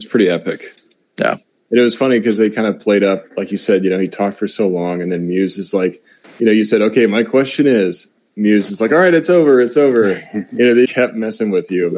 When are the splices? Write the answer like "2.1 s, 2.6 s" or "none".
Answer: 10.8 s